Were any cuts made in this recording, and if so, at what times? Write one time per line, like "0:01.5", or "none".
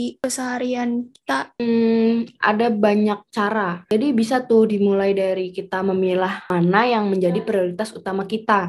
0:03.8